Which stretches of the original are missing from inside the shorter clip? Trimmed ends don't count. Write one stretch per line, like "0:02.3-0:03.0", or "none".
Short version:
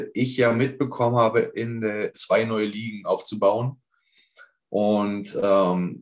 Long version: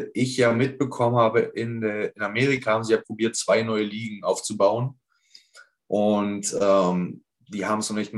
0:02.1-0:03.3